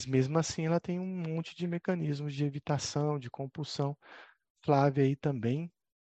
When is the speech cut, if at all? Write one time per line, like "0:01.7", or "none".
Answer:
none